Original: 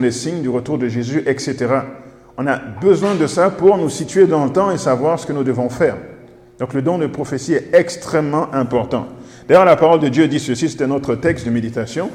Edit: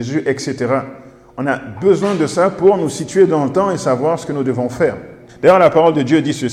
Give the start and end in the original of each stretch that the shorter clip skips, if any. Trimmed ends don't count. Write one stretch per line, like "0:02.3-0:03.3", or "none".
0:06.3-0:09.4